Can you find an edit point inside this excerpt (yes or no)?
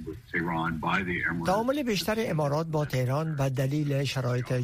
no